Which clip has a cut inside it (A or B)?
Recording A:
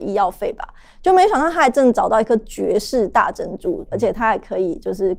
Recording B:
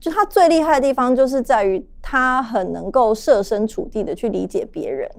A